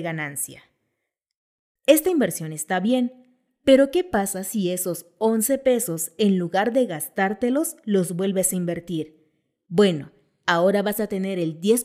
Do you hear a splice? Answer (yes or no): yes